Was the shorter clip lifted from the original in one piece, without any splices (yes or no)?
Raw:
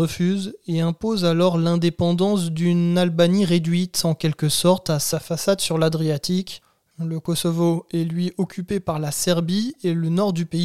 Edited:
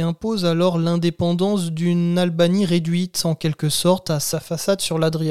yes